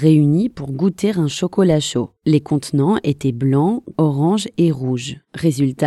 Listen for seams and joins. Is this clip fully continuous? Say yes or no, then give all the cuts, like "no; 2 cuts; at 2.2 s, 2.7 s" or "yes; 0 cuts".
no; 2 cuts; at 2.2 s, 3.9 s